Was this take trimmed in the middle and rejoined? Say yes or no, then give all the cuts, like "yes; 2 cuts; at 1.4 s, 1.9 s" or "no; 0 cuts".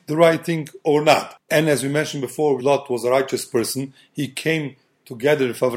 yes; 1 cut; at 2.6 s